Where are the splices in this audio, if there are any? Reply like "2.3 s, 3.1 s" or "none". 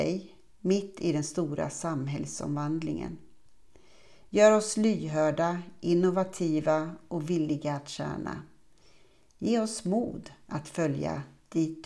none